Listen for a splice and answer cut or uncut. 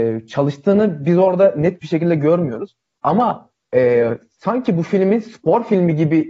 cut